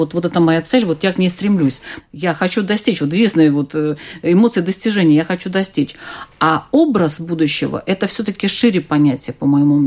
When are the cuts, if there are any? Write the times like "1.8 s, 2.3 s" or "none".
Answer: 2.0 s